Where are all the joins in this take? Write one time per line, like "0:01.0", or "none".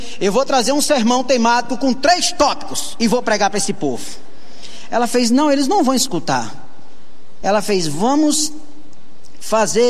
0:07.4